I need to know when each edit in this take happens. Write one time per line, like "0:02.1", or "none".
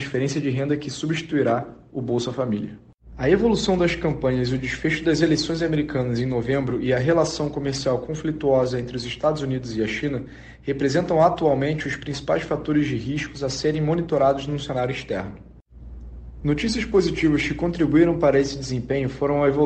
0:03.1
0:16.4